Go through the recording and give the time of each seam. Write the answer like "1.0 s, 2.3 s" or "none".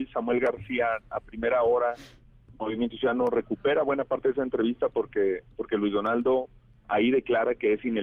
none